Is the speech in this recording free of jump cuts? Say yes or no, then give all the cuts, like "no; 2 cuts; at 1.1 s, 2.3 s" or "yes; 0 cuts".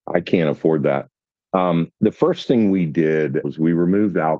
no; 2 cuts; at 1.9 s, 3.4 s